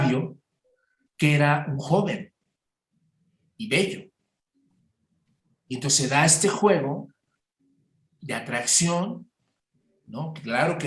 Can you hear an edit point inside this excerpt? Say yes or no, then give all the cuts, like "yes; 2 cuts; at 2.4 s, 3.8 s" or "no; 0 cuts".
yes; 1 cut; at 1.1 s